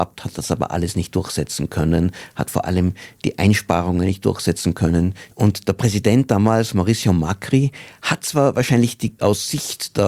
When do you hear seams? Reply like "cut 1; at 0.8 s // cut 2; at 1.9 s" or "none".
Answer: cut 1; at 5.3 s